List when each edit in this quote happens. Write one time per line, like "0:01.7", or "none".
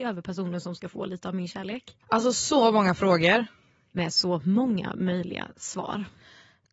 0:02.0